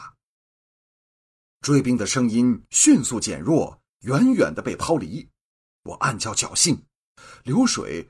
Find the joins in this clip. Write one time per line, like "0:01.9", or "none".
none